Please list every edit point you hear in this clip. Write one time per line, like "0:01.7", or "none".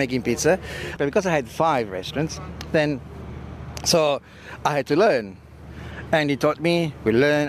0:01.0

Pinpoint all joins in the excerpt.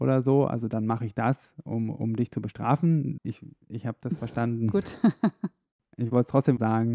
0:03.2

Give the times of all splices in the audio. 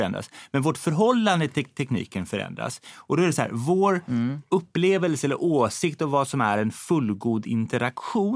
none

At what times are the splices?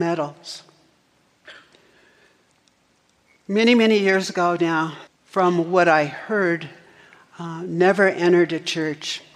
0:05.1

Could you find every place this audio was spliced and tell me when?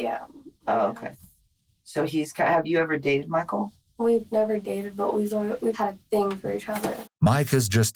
0:05.7
0:07.0

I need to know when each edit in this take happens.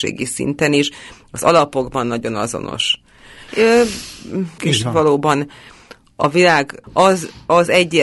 0:03.5
0:04.6
0:06.8

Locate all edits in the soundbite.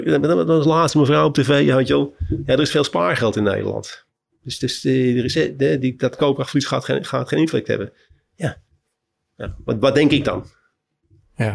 none

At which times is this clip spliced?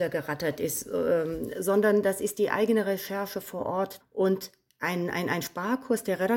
0:04.0

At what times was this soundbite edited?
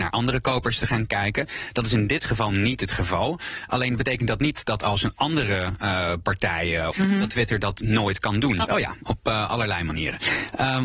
0:06.9
0:08.6

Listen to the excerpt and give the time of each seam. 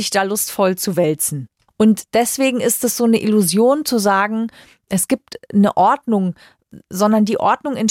0:01.7

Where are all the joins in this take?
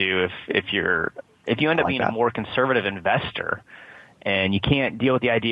none

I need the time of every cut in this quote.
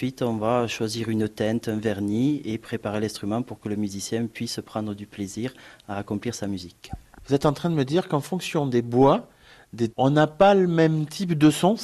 0:09.9

